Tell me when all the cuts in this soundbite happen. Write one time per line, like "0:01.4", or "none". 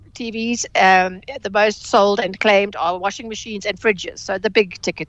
none